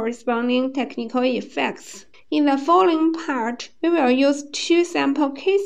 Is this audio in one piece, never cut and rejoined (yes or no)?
yes